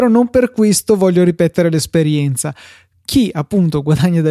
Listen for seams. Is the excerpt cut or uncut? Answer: uncut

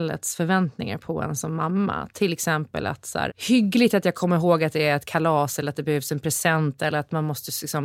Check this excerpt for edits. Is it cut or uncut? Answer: cut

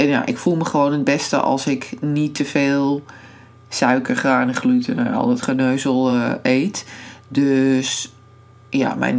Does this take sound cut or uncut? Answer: uncut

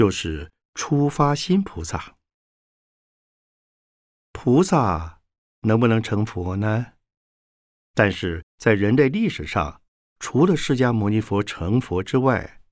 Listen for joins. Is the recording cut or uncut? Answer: cut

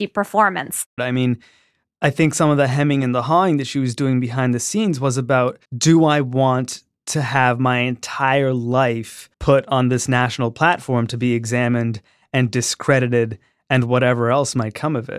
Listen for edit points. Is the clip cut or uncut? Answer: cut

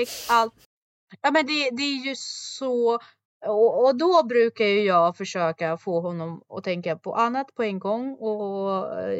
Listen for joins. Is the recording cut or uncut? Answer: uncut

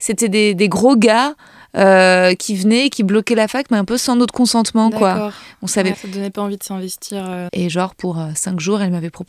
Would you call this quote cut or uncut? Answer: cut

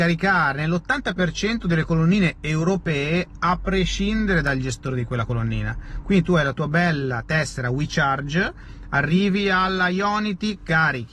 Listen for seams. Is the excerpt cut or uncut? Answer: uncut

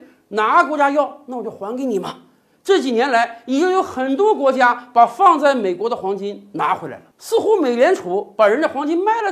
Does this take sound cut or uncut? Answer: uncut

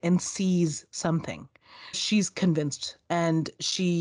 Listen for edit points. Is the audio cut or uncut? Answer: cut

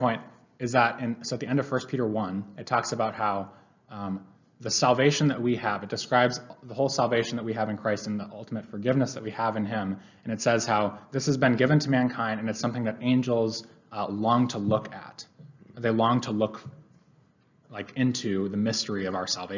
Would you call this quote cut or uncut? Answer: uncut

